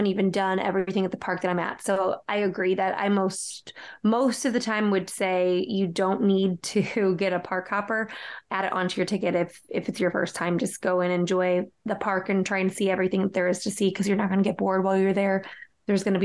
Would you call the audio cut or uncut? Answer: uncut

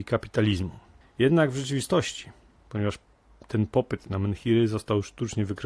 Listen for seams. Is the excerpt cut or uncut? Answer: cut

